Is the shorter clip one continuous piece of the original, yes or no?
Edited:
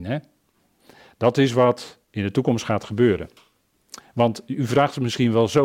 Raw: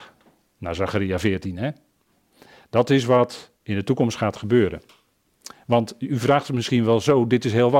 yes